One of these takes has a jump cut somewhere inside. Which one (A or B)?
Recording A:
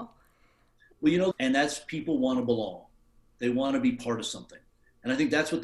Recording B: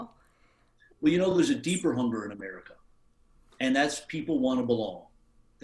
A